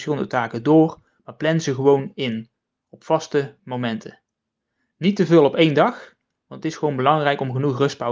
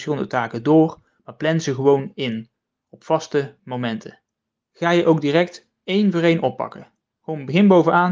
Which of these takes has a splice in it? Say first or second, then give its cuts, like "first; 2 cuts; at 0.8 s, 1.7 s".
second; 1 cut; at 4.6 s